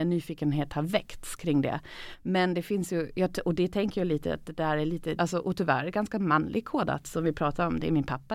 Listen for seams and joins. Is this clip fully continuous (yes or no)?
no